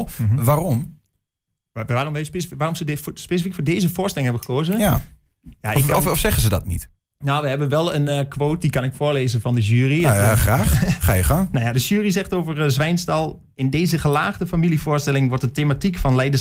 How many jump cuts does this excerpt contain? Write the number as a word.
zero